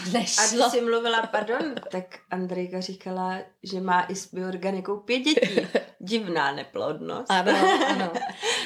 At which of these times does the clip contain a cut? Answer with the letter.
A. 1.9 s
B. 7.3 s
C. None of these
A